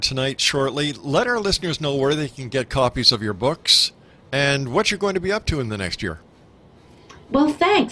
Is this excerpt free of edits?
yes; 0 cuts

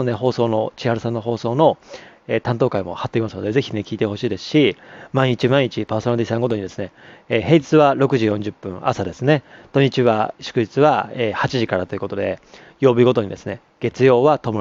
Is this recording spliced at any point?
no; 0 cuts

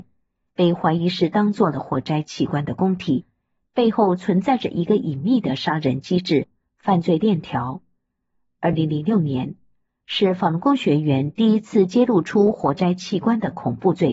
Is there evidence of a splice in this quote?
no; 0 cuts

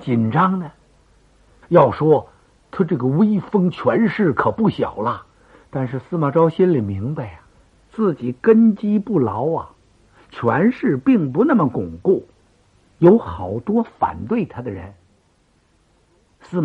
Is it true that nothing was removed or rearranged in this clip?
no; 1 cut; at 1.6 s

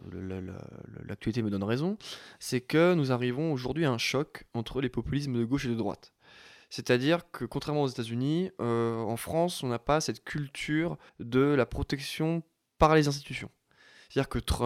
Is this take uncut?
no; 1 cut; at 11.1 s

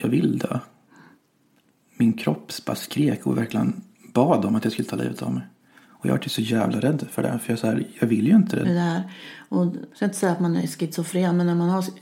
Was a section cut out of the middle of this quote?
yes; 2 cuts; at 8.6 s, 9.9 s

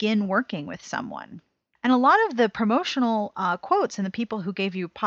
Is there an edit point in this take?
yes; 1 cut; at 1.8 s

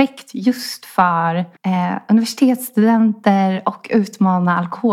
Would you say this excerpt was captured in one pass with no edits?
no; 1 cut; at 1.6 s

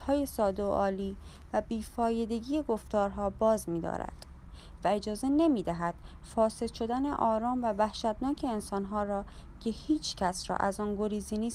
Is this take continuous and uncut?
yes; 0 cuts

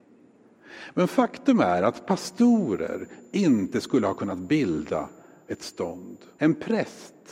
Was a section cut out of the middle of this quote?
yes; 1 cut; at 6.4 s

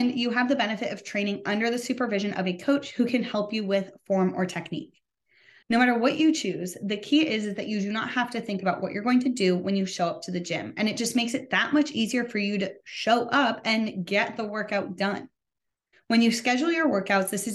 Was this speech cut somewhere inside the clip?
yes; 1 cut; at 15.9 s

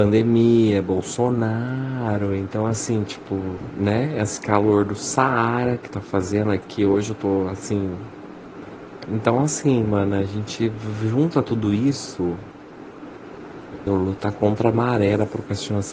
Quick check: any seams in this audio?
yes; 2 cuts; at 9.0 s, 13.9 s

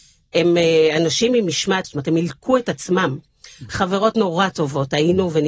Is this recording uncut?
no; 2 cuts; at 1.8 s, 3.7 s

